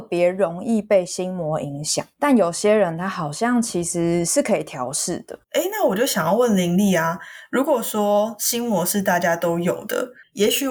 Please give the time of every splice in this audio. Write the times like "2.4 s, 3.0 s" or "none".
5.4 s

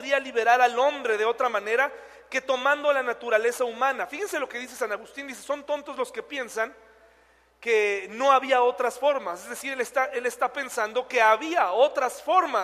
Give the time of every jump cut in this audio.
none

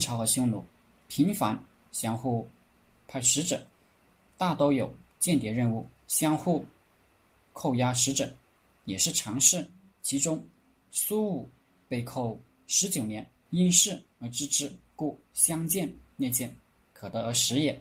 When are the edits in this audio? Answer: 13.4 s

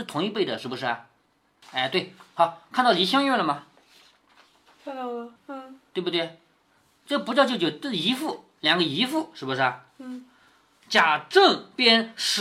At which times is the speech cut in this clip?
1.6 s, 5.4 s

